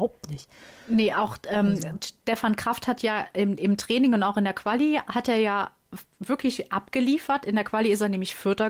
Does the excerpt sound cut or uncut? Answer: uncut